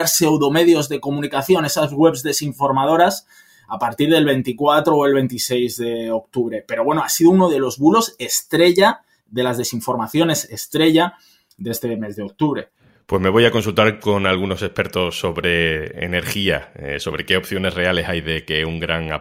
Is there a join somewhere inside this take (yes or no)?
no